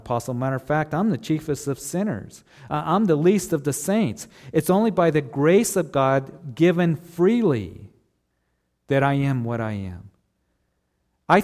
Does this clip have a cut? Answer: no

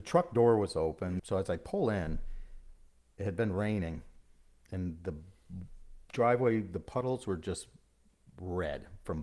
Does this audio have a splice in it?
yes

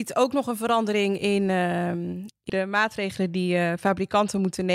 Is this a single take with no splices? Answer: no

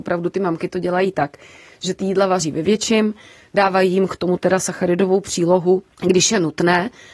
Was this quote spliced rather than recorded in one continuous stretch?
no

